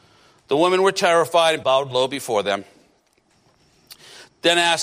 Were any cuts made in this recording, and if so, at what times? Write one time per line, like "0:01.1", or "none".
0:01.6